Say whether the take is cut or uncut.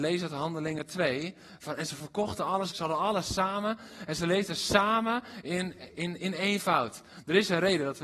cut